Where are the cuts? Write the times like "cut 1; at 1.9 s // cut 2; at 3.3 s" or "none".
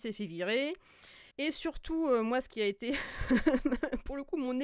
cut 1; at 1.3 s